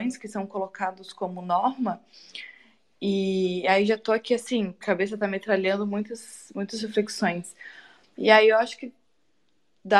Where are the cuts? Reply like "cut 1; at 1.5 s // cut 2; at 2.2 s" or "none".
cut 1; at 4.8 s // cut 2; at 8.0 s